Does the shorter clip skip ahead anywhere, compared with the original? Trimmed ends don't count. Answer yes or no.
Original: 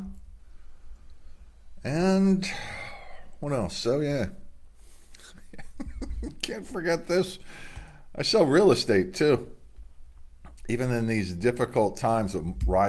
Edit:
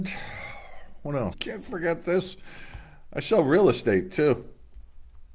yes